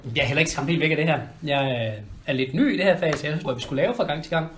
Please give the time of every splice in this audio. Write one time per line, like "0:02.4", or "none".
0:03.4